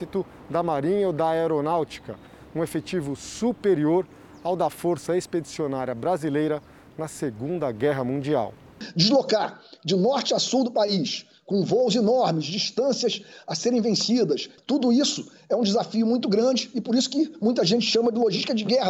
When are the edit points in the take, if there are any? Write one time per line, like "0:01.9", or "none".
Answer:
none